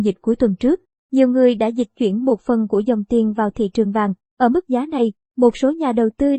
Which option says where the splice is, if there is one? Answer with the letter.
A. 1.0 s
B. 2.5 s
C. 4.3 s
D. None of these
C